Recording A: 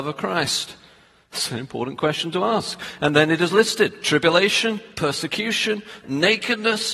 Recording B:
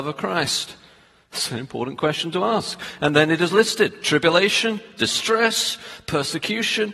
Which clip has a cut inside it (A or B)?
A